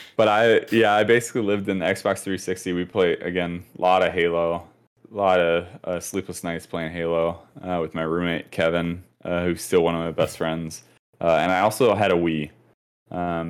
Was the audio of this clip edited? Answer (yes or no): no